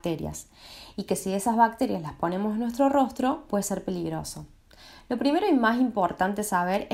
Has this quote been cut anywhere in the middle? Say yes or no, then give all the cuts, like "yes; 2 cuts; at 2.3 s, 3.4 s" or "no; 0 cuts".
no; 0 cuts